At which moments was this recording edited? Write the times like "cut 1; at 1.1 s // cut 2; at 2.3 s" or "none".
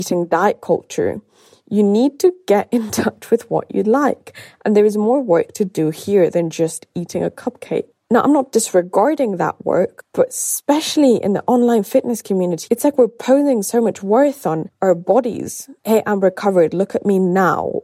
cut 1; at 12.7 s // cut 2; at 15.8 s